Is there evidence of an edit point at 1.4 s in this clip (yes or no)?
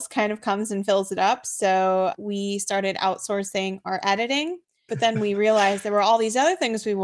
no